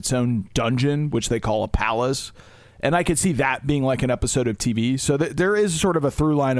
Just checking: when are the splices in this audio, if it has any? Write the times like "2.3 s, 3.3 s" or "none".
none